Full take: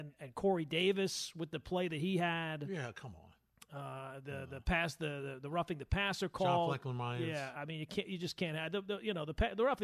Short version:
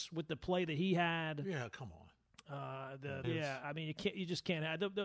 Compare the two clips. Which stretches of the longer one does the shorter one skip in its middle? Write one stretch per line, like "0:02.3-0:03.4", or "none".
0:04.5-0:07.2